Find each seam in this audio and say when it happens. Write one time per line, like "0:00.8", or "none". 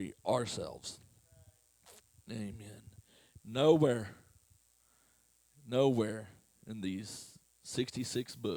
0:03.4